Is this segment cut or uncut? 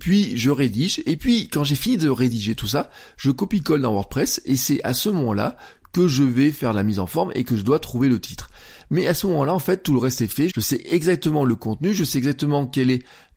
cut